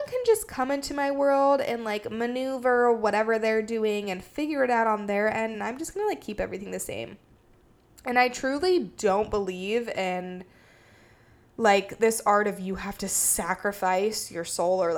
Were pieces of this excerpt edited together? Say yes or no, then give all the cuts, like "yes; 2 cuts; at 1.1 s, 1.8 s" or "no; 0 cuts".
no; 0 cuts